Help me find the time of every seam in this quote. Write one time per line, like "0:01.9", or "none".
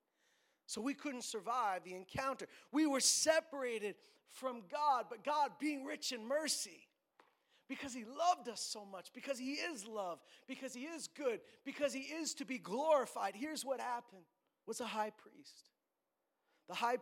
0:14.6